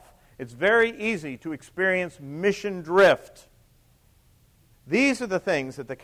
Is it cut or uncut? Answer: cut